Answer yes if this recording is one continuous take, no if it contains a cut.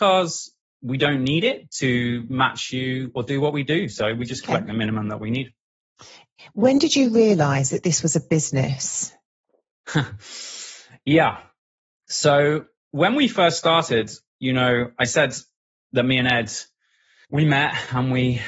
yes